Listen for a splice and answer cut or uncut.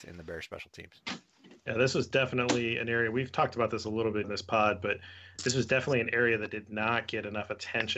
cut